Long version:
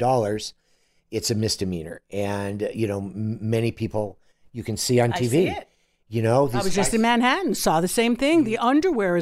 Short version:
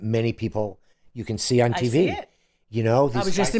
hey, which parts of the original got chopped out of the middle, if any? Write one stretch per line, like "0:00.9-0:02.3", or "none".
none